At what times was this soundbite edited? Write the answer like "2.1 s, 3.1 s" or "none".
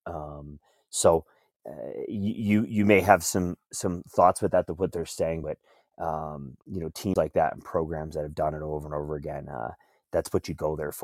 none

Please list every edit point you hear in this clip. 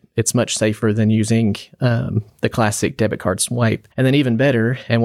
3.9 s

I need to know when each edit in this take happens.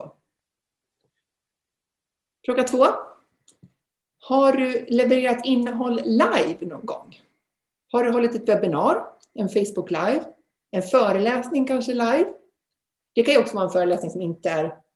none

